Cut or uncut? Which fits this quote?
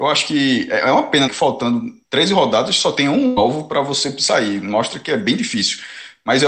cut